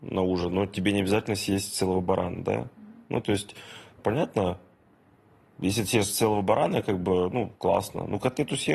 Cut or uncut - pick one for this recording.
cut